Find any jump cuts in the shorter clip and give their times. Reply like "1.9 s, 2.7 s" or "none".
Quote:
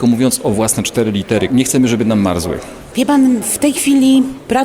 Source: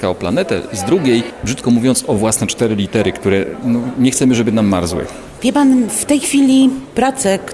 1.5 s